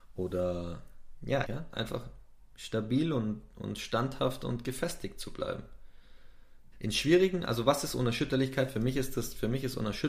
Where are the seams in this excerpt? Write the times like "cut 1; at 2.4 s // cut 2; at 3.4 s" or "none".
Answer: cut 1; at 1.4 s // cut 2; at 6.7 s